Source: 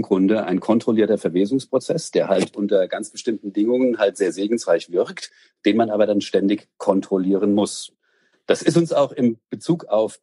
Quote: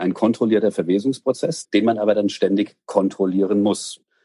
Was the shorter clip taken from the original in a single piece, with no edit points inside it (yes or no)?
no